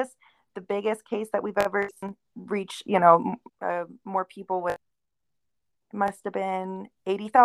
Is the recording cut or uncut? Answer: cut